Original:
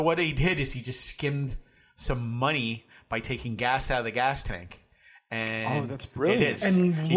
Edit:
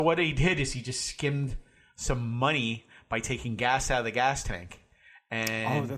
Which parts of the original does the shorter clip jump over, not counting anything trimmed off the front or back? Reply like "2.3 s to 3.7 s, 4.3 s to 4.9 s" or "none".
none